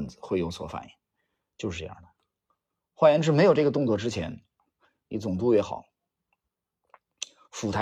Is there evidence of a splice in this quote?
no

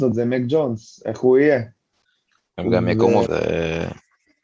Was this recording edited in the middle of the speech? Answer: yes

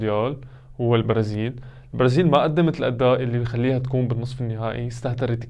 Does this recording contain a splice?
no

